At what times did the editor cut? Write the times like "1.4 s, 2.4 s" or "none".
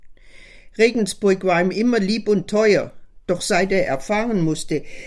none

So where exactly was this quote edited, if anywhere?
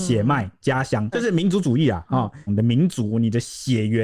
1.1 s, 2.5 s

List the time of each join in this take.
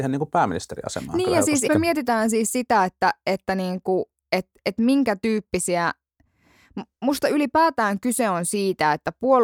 1.7 s

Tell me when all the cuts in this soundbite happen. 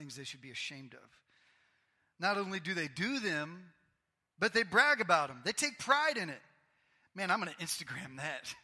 none

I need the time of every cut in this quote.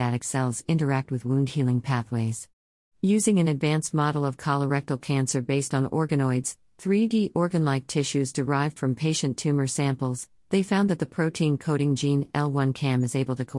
none

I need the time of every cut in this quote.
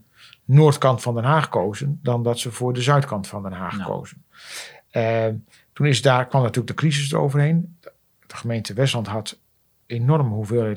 none

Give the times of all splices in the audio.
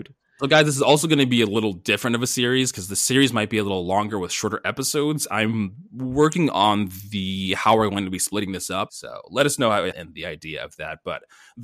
8.9 s, 9.9 s

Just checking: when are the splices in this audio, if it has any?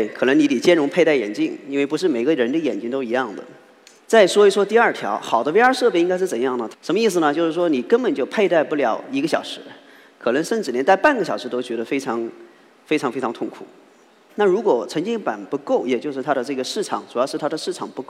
4.0 s, 6.7 s, 14.3 s

